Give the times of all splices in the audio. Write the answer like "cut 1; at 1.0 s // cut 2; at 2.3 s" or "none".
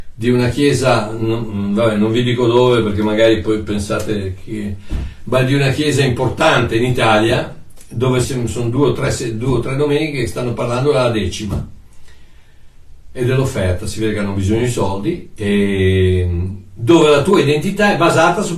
cut 1; at 8.2 s